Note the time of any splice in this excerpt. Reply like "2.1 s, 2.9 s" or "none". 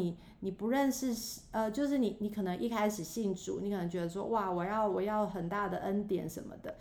none